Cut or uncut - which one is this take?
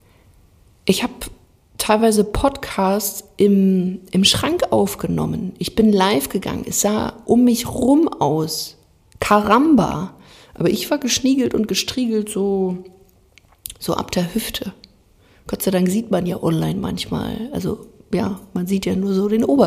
uncut